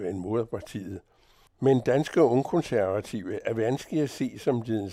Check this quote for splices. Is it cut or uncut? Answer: uncut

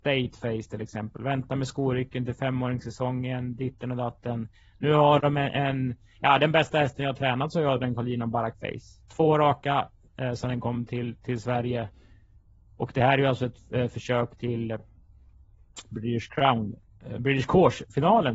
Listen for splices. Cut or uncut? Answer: uncut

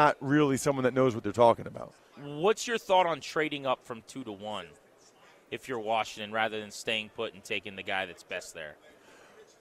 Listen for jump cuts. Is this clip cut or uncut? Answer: cut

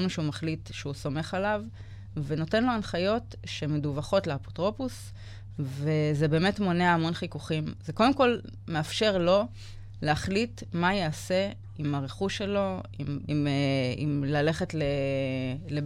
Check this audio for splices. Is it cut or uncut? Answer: cut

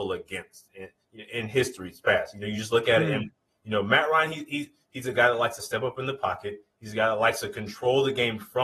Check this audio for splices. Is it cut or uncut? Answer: uncut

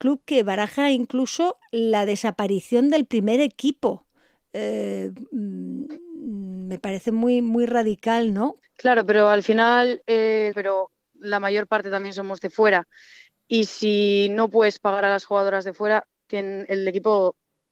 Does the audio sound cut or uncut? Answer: cut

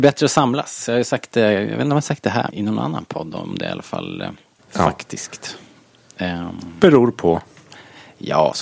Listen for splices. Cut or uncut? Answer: cut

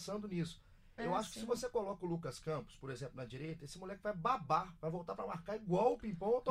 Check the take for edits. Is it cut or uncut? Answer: cut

